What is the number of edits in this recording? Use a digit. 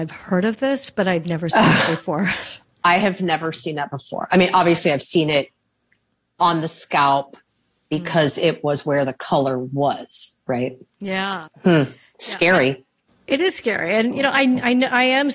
1